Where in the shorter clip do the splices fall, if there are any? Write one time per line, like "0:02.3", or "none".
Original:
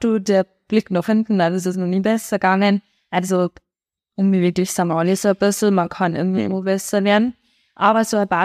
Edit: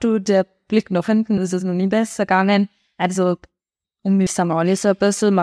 0:01.4
0:04.3